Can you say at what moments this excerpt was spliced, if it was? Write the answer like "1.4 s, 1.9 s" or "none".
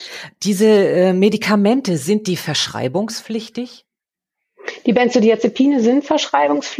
none